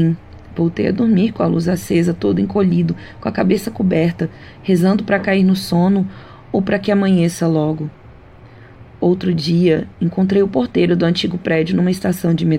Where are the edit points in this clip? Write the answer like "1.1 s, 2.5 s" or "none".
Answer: none